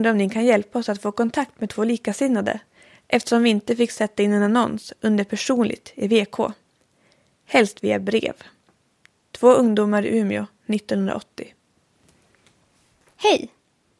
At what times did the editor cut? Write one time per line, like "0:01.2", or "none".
none